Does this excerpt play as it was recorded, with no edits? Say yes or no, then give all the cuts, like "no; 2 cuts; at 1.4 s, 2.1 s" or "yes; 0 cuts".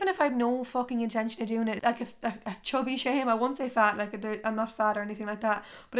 no; 1 cut; at 1.8 s